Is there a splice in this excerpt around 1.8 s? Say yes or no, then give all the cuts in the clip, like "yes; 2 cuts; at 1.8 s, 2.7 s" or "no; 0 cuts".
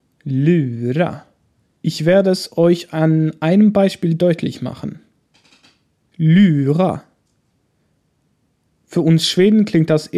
yes; 2 cuts; at 1.8 s, 6.1 s